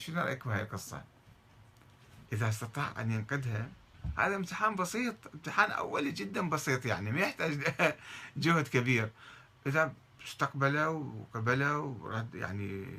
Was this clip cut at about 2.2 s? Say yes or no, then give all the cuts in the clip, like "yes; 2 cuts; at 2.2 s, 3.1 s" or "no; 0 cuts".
yes; 1 cut; at 2.2 s